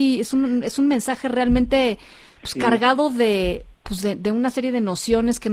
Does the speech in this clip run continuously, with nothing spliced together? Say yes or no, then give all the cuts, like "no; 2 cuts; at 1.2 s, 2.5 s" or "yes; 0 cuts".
no; 1 cut; at 3.7 s